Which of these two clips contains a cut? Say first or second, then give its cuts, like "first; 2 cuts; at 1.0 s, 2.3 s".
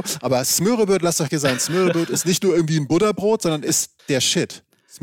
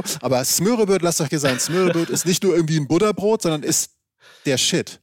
first; 1 cut; at 4.0 s